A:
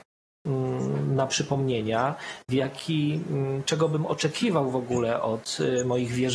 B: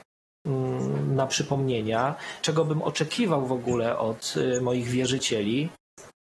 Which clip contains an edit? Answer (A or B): B